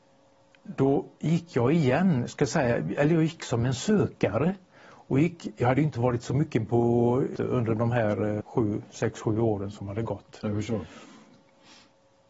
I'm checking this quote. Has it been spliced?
yes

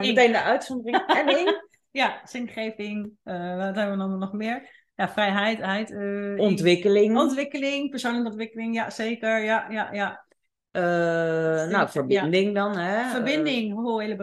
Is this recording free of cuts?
yes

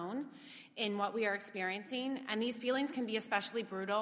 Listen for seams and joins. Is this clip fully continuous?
yes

